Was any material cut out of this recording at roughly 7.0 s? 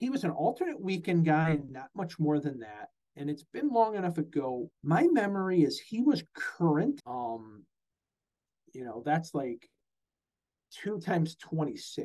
yes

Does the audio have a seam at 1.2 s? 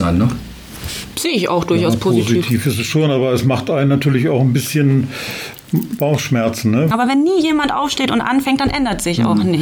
no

